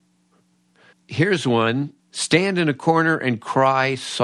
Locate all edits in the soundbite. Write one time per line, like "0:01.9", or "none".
0:00.9
0:02.0